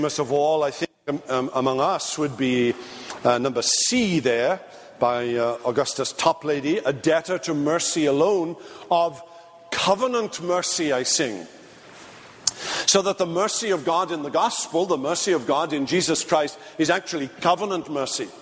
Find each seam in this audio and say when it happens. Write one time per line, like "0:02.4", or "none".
none